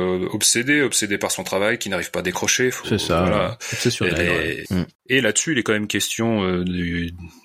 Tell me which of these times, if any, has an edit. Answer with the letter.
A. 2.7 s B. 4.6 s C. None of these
B